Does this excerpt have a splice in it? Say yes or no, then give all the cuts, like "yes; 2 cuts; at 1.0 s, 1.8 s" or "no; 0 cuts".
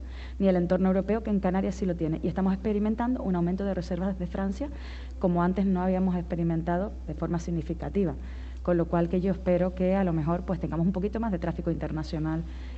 yes; 1 cut; at 7.1 s